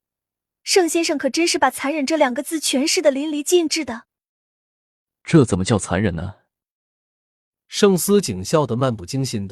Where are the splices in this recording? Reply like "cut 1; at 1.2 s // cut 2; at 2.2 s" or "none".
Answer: none